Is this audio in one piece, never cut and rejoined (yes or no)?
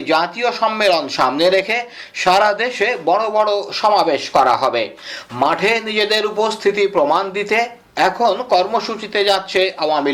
yes